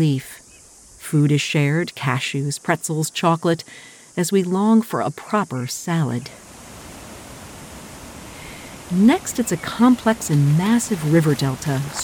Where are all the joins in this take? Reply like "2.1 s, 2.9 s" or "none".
none